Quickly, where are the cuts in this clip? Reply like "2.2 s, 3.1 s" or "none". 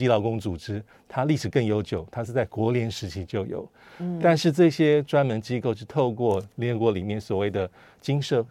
none